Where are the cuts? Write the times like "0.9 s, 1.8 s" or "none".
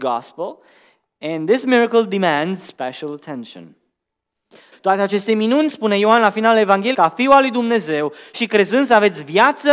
4.7 s, 6.9 s